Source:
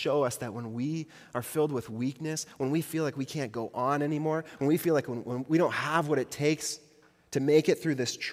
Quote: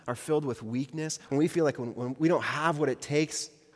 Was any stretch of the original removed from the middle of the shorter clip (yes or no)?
yes